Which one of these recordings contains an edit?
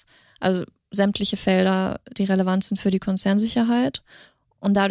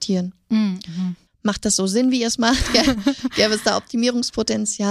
second; 1 cut; at 1.3 s

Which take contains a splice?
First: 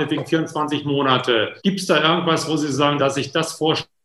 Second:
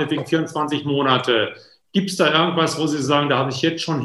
first; 2 cuts; at 1.6 s, 3.0 s

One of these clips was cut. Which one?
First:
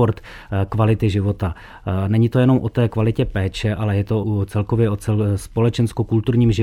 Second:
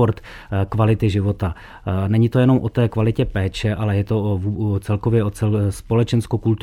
first; 1 cut; at 4.2 s

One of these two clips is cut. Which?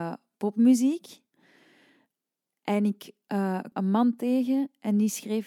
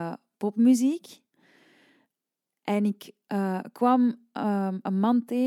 first; 1 cut; at 3.7 s

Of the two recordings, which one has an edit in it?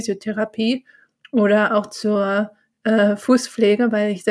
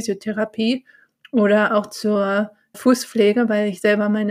second; 1 cut; at 2.7 s

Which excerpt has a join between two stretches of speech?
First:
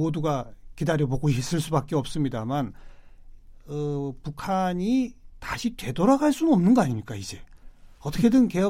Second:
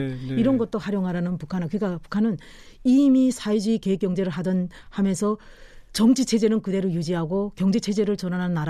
second; 1 cut; at 5.9 s

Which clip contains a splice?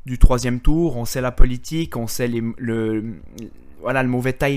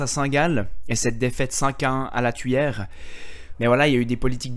second; 1 cut; at 3.5 s

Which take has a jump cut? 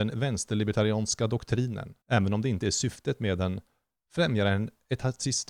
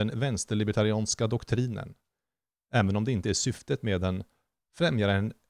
first; 1 cut; at 2.0 s

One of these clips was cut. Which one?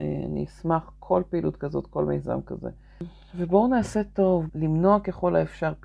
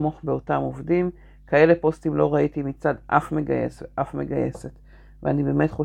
first; 1 cut; at 4.5 s

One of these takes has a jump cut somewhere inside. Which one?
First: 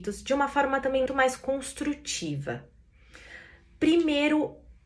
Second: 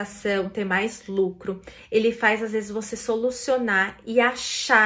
first; 1 cut; at 1.1 s

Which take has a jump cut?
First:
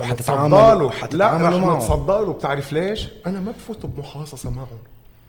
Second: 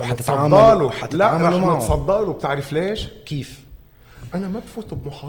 first; 1 cut; at 3.2 s

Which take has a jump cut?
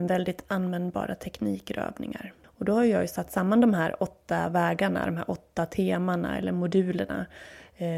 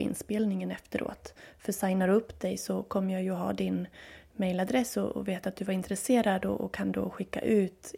first; 1 cut; at 2.4 s

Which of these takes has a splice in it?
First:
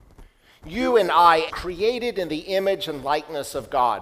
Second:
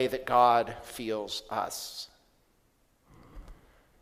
first; 1 cut; at 1.5 s

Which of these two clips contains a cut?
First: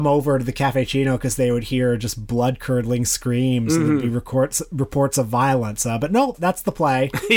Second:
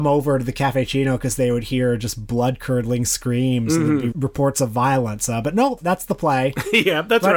second; 1 cut; at 4.1 s

